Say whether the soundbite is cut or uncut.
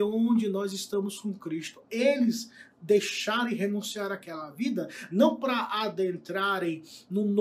uncut